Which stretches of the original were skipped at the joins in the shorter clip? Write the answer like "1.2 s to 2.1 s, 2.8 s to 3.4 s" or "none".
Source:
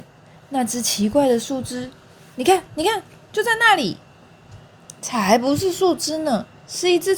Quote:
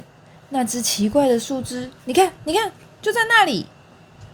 2.0 s to 2.3 s